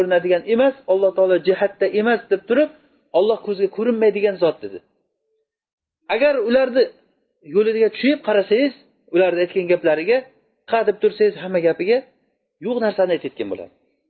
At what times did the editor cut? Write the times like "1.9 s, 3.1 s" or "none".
10.7 s